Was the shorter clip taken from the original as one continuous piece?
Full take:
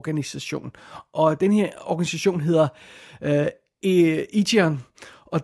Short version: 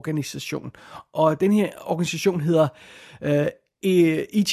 yes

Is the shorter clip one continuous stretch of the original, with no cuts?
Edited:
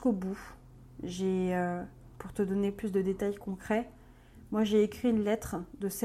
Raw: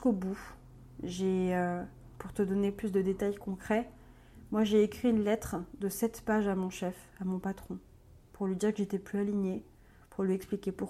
yes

